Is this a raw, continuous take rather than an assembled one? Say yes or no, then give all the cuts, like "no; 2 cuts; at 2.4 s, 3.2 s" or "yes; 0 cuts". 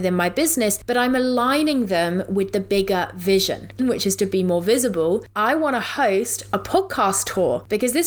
no; 1 cut; at 3.8 s